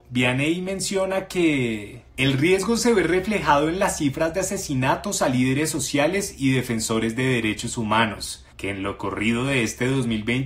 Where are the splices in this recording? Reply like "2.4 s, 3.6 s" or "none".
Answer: 2.1 s, 8.5 s